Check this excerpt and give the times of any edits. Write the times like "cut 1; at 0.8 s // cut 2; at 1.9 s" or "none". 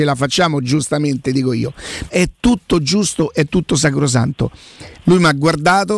cut 1; at 2.1 s // cut 2; at 5.0 s